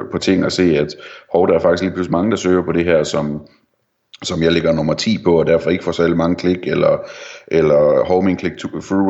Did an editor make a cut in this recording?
no; 0 cuts

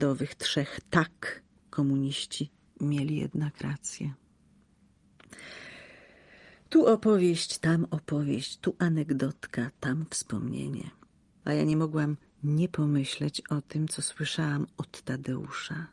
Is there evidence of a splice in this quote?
yes; 1 cut; at 11.4 s

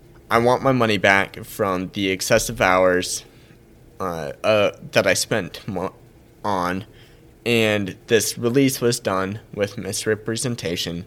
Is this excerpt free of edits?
yes; 0 cuts

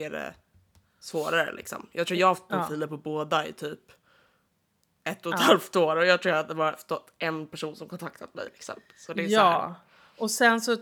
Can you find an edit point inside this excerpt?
no; 0 cuts

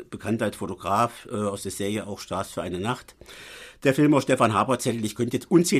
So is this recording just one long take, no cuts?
yes; 0 cuts

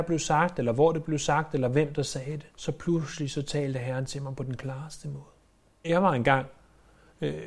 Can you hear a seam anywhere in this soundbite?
yes; 2 cuts; at 2.5 s, 5.8 s

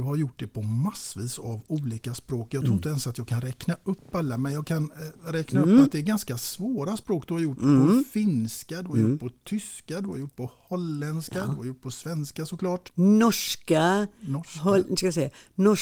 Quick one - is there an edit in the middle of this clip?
no; 0 cuts

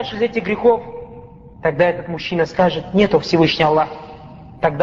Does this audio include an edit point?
no; 0 cuts

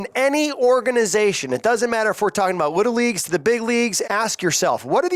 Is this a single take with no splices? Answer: no; 1 cut; at 4.0 s

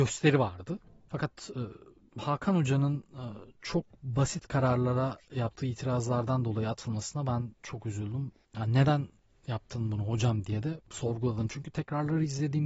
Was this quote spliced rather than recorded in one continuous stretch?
no; 0 cuts

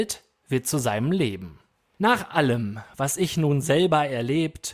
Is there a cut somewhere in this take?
yes; 1 cut; at 2.0 s

